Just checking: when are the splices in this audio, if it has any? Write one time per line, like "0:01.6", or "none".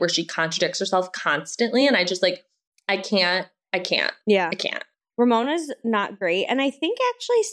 none